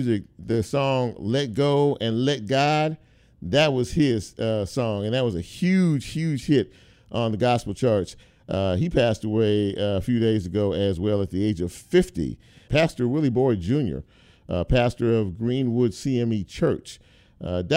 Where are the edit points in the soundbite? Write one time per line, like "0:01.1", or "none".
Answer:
0:12.7